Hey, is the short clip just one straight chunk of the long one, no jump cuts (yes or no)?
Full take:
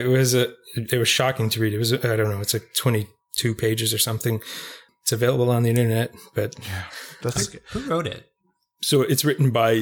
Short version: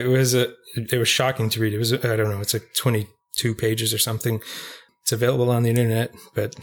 yes